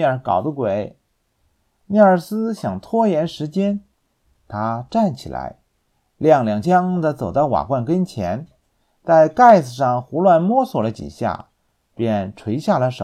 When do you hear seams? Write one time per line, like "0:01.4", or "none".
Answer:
0:06.6